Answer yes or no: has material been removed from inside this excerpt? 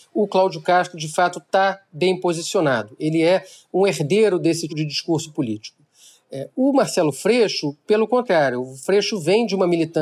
yes